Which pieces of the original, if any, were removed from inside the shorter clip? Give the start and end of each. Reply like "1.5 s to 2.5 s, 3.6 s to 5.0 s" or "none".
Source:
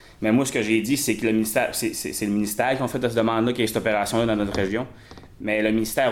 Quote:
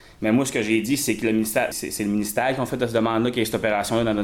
1.7 s to 1.9 s